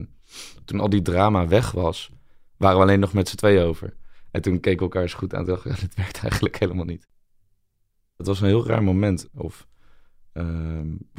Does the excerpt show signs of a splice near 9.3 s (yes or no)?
yes